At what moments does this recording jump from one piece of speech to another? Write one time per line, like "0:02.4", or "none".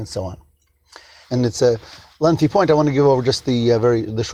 0:01.2